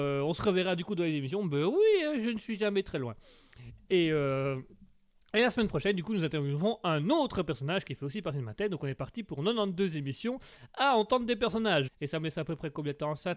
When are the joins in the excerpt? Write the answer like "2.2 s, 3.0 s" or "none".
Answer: 11.9 s